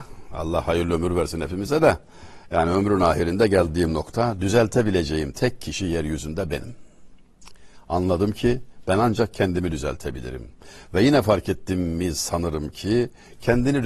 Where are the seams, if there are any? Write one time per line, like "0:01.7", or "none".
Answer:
none